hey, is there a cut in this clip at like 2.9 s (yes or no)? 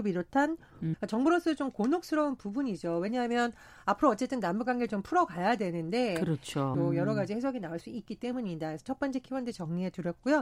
no